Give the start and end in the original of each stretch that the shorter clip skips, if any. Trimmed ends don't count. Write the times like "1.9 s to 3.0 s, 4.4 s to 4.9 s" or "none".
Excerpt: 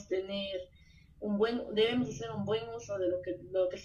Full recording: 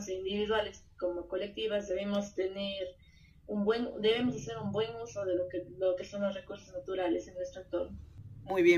none